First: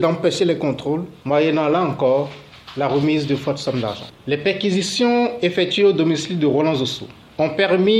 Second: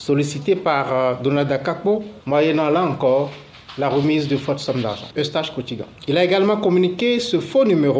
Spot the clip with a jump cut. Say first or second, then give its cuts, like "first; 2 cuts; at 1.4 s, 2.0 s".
second; 2 cuts; at 2.2 s, 5.2 s